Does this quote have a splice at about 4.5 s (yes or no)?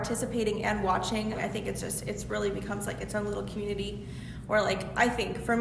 no